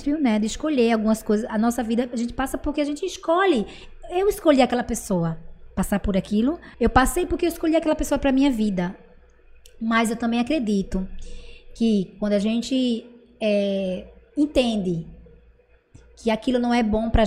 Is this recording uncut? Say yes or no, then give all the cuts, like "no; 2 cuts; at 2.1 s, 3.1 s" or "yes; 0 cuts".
no; 1 cut; at 6.7 s